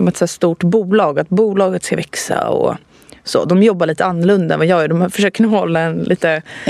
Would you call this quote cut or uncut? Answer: uncut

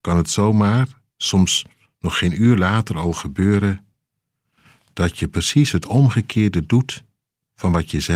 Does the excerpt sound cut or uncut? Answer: uncut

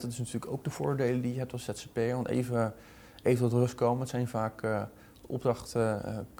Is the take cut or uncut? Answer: uncut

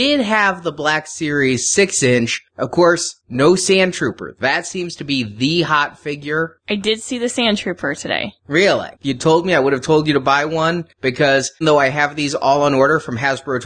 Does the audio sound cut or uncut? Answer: cut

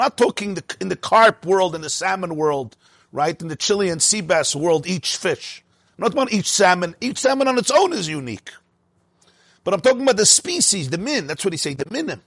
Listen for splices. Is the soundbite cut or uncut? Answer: uncut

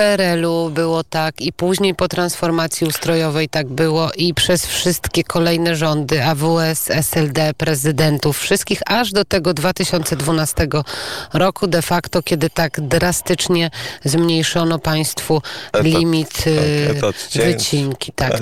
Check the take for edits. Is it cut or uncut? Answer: uncut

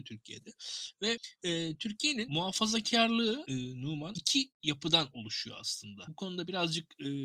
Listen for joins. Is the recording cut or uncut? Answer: uncut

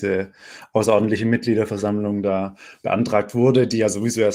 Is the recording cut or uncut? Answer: uncut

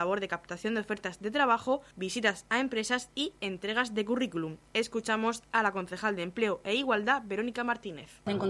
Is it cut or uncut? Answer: uncut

